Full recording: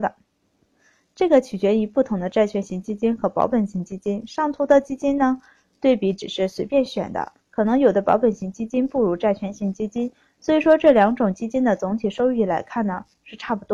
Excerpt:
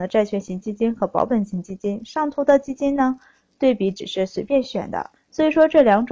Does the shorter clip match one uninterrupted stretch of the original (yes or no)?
no